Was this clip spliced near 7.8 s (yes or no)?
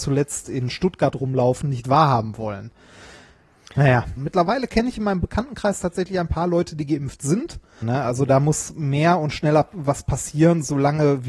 yes